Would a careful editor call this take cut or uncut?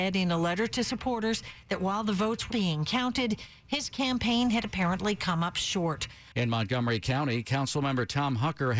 cut